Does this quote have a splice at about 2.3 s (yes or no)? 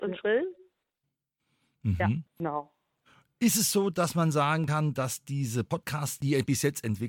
yes